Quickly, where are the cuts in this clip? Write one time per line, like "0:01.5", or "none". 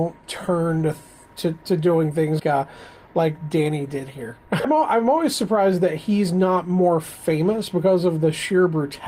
0:02.4
0:04.6